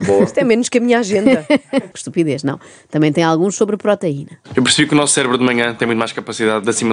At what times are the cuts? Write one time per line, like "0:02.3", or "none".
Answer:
0:01.9

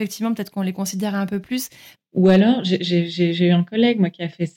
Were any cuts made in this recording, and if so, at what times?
0:01.9

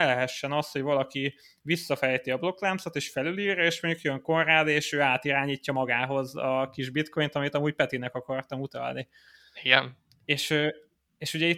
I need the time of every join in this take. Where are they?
none

